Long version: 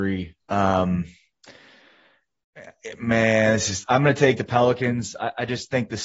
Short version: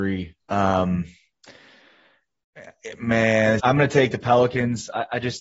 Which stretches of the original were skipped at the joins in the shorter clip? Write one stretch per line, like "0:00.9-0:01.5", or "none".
0:03.6-0:03.9